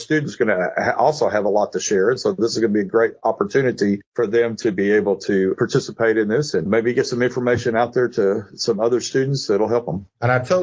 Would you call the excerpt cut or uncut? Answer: uncut